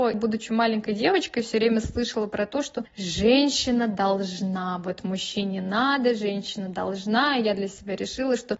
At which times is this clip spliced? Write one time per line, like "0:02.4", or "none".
none